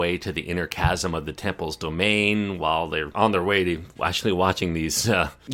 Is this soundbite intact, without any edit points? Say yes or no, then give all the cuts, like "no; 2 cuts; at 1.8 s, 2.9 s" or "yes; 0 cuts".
yes; 0 cuts